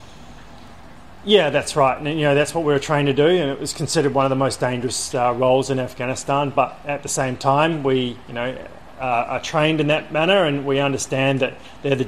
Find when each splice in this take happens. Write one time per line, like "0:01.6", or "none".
none